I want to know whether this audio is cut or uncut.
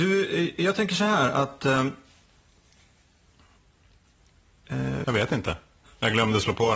cut